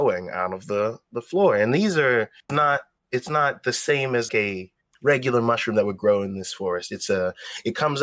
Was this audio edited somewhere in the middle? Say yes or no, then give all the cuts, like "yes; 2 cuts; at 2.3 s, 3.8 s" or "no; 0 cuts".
yes; 2 cuts; at 2.5 s, 4.3 s